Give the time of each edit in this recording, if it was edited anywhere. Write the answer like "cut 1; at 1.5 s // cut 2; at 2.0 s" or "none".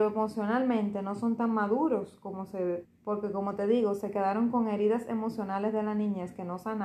cut 1; at 2.9 s